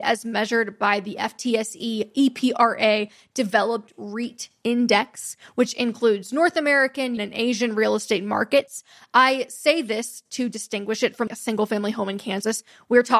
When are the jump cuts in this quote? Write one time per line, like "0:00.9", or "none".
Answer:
0:07.2
0:11.3